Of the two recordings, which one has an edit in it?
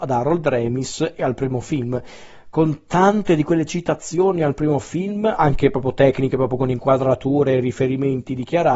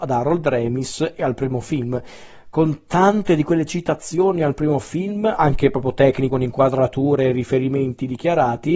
second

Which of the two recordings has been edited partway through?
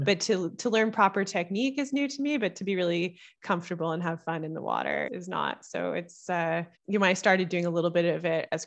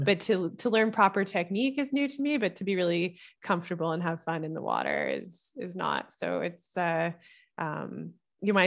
first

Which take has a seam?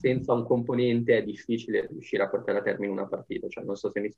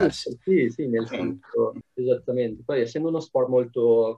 second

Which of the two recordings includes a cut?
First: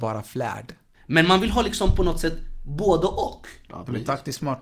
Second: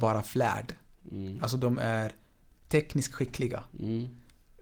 first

